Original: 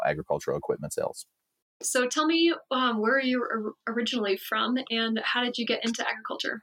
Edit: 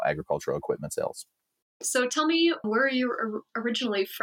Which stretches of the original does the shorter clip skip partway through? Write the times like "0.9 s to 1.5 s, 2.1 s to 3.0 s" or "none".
2.6 s to 3.0 s